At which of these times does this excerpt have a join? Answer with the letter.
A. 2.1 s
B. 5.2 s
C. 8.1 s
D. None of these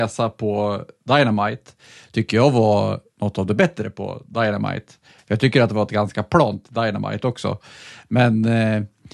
D